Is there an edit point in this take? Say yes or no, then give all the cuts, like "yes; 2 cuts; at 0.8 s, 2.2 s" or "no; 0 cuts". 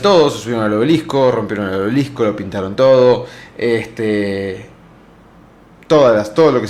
no; 0 cuts